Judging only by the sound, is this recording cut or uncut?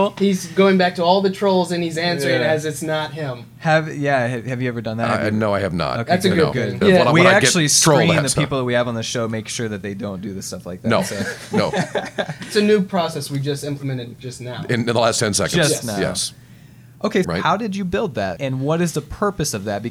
cut